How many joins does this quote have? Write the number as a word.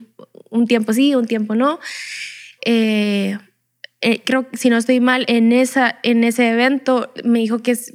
two